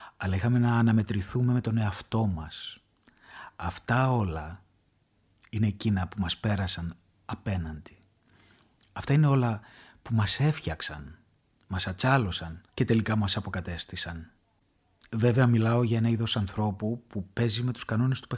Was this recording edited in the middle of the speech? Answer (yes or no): yes